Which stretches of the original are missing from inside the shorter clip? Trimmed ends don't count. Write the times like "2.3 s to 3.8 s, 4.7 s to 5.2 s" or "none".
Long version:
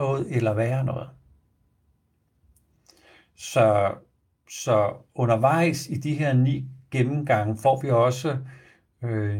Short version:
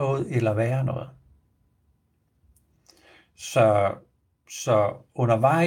none